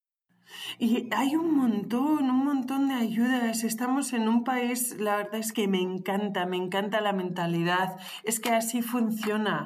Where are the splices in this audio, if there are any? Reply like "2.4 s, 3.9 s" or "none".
5.5 s